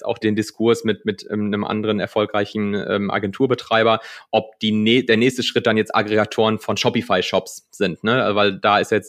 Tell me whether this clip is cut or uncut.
uncut